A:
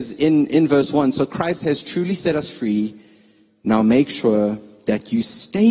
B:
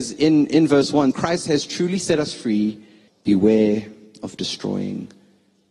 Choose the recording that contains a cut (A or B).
B